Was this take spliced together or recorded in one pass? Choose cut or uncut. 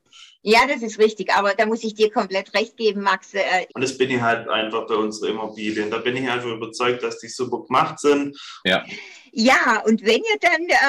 cut